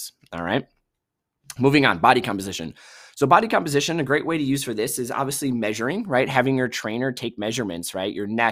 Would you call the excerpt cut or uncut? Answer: uncut